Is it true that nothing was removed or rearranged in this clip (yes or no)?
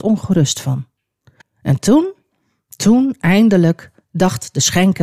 no